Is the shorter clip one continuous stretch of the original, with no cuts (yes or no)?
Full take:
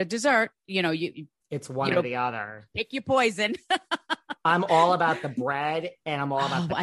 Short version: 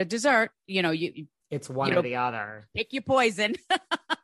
yes